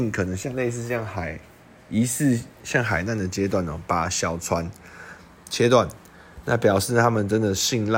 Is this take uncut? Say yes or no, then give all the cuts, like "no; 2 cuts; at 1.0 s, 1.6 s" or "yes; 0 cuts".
yes; 0 cuts